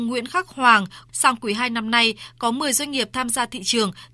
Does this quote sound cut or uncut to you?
cut